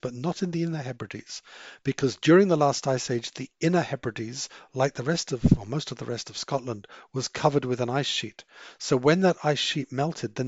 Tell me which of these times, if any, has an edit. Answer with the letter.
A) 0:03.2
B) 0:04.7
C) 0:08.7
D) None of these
D